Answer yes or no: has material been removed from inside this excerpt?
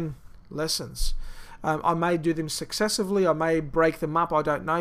no